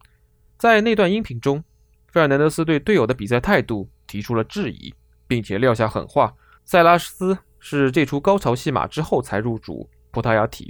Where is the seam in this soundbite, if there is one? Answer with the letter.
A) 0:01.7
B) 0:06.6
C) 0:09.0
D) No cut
B